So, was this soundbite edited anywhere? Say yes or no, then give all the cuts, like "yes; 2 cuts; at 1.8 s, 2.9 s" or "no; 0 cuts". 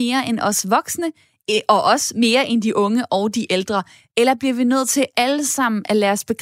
no; 0 cuts